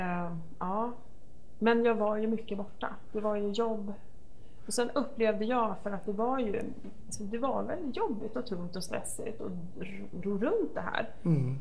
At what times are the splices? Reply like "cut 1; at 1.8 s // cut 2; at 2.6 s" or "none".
none